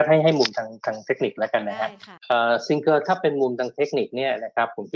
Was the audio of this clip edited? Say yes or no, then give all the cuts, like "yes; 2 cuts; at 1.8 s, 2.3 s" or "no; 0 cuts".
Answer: yes; 1 cut; at 2.2 s